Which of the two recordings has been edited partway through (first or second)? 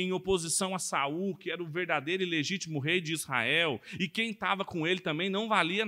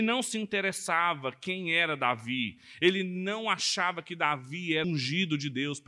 second